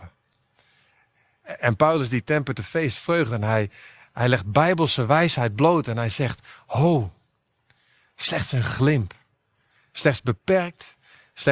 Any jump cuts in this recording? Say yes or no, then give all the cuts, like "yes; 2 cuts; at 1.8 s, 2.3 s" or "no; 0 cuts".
no; 0 cuts